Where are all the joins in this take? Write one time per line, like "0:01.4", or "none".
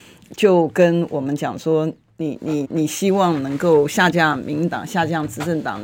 0:02.6